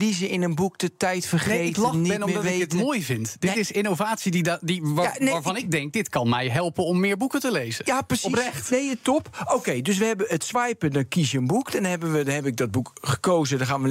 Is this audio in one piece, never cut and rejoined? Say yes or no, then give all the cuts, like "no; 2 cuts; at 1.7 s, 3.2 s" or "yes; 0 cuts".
yes; 0 cuts